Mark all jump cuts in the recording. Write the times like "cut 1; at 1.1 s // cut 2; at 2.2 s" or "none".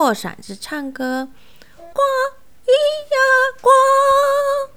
cut 1; at 1.9 s